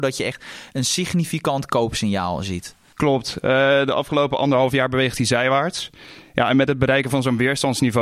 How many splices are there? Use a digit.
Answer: 0